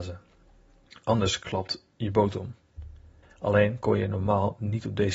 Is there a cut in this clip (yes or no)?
yes